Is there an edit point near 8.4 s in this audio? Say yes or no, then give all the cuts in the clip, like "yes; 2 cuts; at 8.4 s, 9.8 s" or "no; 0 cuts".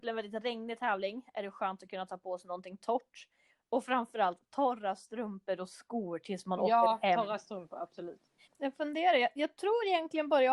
yes; 1 cut; at 8.4 s